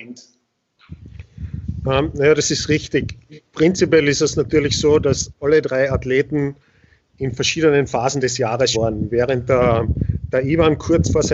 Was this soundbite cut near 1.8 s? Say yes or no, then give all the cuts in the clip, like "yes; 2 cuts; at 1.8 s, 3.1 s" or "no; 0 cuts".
no; 1 cut; at 8.7 s